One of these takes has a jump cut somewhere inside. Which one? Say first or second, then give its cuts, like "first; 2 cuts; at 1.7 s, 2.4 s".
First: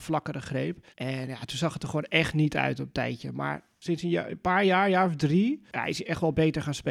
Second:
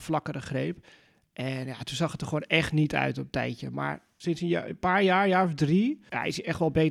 first; 1 cut; at 0.9 s